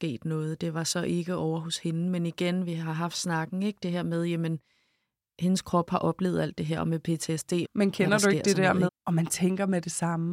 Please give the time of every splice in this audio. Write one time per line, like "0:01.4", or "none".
0:07.6
0:08.9